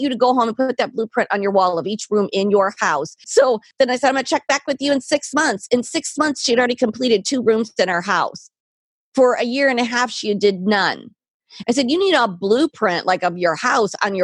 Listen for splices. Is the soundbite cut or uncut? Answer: cut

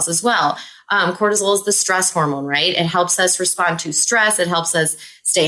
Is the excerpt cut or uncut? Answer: uncut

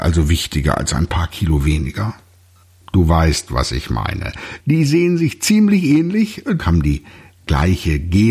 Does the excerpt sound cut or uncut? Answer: cut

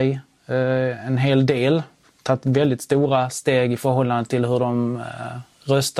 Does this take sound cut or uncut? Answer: uncut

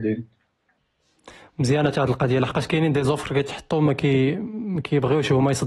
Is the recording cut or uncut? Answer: uncut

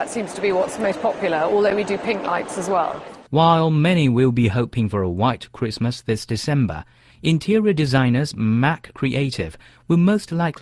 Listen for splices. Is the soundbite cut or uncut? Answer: cut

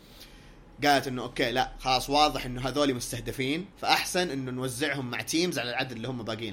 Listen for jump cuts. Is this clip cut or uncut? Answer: cut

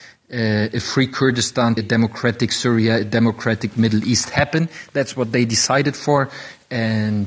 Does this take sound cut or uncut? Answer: cut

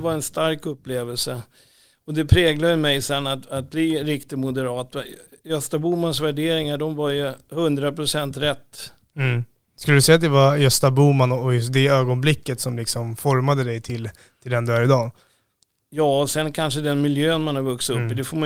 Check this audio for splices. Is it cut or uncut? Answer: uncut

